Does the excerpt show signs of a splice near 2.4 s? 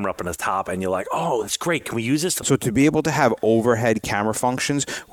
yes; 1 cut; at 2.4 s

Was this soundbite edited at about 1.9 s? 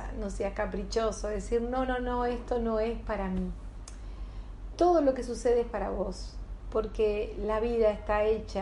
yes; 1 cut; at 1.9 s

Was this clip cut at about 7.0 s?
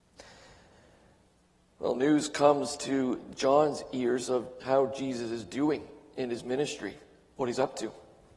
no; 1 cut; at 4.6 s

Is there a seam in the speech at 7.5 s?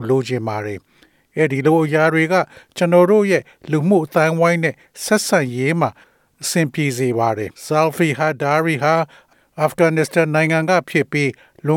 yes; 1 cut; at 7.5 s

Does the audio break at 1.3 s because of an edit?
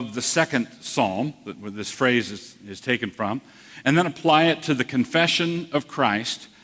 no; 0 cuts

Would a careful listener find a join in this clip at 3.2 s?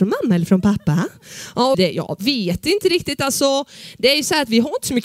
no; 1 cut; at 1.7 s

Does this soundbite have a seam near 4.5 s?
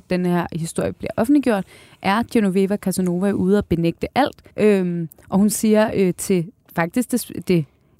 yes; 1 cut; at 4.5 s

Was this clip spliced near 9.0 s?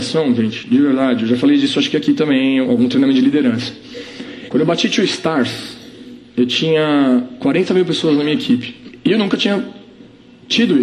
no; 2 cuts; at 2.6 s, 4.5 s

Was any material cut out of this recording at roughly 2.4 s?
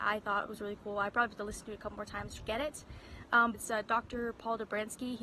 yes; 2 cuts; at 2.4 s, 3.5 s

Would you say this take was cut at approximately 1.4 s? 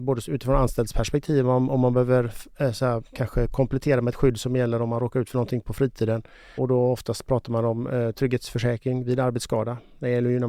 no; 2 cuts; at 6.6 s, 8.1 s

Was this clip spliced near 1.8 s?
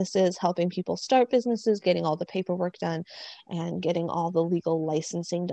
no; 0 cuts

